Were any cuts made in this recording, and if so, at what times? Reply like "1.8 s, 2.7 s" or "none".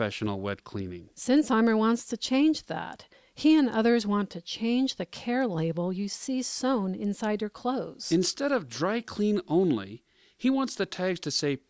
none